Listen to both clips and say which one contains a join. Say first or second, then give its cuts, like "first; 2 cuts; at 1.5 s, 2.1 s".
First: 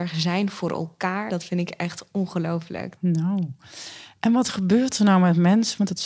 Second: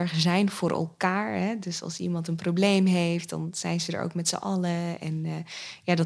first; 2 cuts; at 1.3 s, 3.0 s